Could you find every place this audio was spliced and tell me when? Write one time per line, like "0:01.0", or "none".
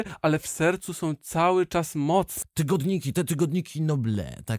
0:02.4